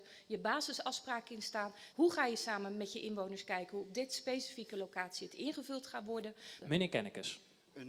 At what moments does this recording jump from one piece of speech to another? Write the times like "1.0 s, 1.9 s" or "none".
1.9 s, 6.6 s